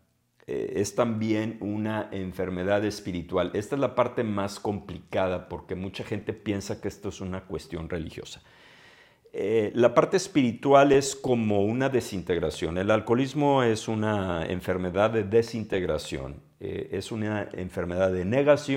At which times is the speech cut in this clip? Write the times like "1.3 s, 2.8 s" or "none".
none